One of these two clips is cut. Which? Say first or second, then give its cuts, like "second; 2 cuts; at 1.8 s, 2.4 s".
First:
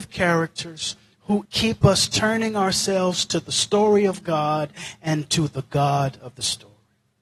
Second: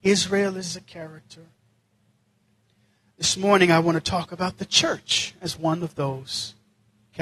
first; 1 cut; at 1.5 s